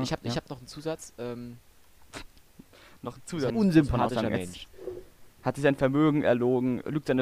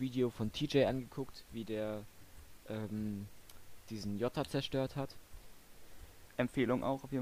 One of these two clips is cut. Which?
first; 1 cut; at 3.5 s

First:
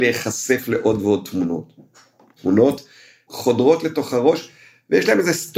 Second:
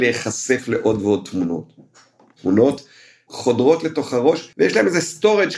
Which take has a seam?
second; 1 cut; at 4.5 s

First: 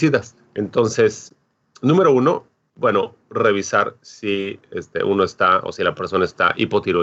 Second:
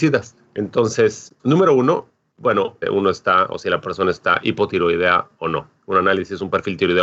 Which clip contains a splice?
second; 2 cuts; at 1.4 s, 2.8 s

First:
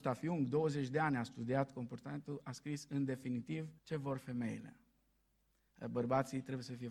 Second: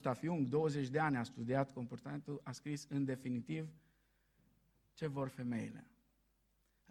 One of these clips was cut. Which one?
first; 1 cut; at 3.8 s

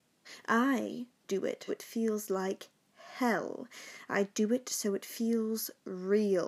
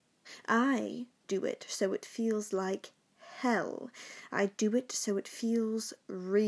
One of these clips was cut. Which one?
first; 1 cut; at 1.7 s

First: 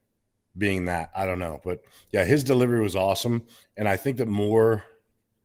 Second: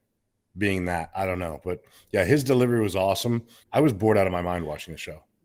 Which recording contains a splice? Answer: second; 1 cut; at 3.6 s

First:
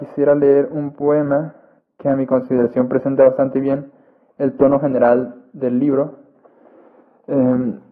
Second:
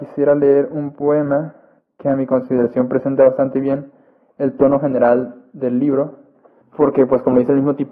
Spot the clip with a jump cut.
second; 1 cut; at 6.6 s

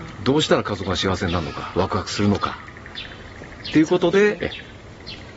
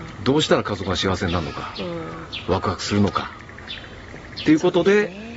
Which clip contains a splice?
first; 2 cuts; at 1.7 s, 4.4 s

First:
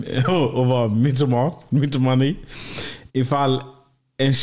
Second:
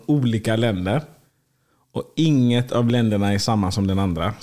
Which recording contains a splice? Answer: first; 1 cut; at 3.1 s

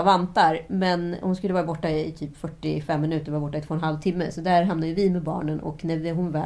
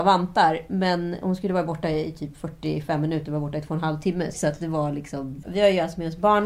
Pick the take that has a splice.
second; 2 cuts; at 4.3 s, 5.4 s

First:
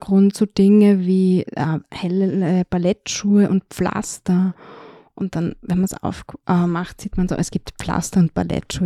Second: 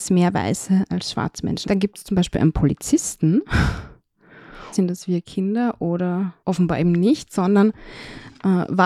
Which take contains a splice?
second; 3 cuts; at 1.6 s, 4.7 s, 6.4 s

